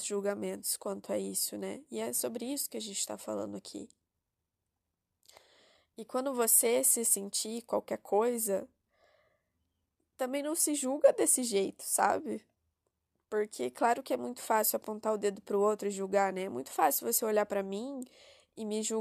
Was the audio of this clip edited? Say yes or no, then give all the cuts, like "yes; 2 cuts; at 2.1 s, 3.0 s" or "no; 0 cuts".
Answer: no; 0 cuts